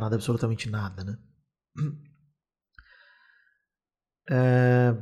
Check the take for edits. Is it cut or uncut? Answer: uncut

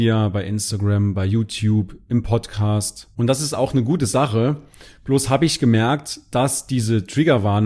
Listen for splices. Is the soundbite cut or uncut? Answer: uncut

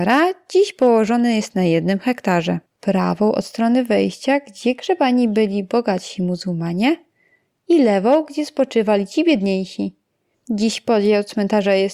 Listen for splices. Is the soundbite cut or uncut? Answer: cut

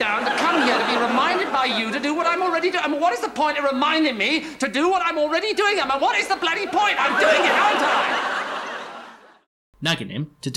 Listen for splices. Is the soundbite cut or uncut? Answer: uncut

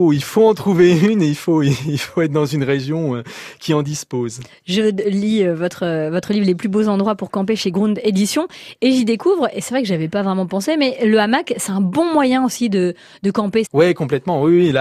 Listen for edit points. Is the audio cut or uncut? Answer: cut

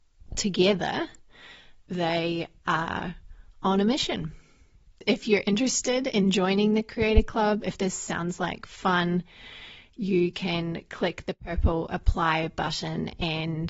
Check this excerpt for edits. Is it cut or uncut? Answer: uncut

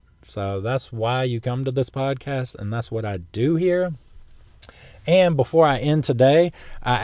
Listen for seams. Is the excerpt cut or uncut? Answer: uncut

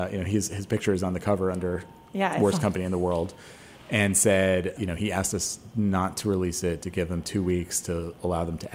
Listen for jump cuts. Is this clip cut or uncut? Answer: cut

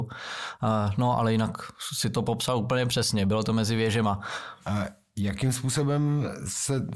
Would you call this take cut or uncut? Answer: cut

